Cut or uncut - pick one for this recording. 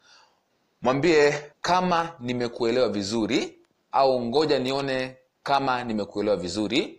cut